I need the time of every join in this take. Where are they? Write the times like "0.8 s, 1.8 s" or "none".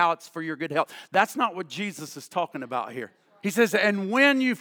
3.4 s